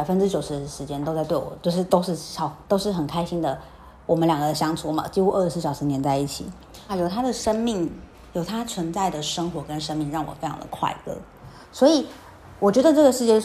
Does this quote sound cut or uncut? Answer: cut